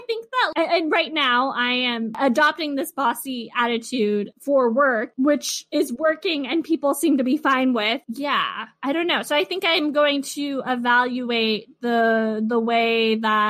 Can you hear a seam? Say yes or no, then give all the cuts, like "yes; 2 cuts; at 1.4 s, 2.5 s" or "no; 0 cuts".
no; 0 cuts